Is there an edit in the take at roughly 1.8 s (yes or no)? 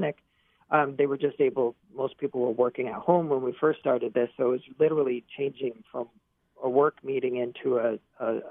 yes